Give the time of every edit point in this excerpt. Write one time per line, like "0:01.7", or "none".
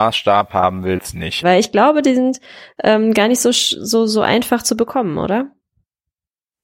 0:01.4